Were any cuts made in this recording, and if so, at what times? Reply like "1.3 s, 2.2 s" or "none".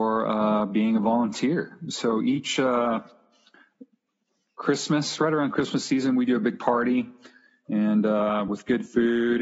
none